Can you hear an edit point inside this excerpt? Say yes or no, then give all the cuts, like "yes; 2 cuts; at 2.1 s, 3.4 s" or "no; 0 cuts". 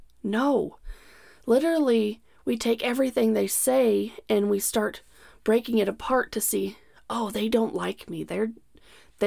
no; 0 cuts